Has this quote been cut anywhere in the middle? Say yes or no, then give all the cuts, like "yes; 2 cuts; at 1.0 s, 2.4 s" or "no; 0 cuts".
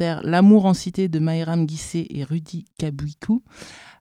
no; 0 cuts